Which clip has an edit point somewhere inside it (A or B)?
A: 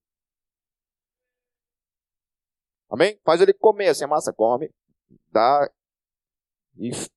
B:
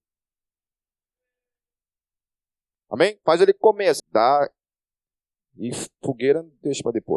B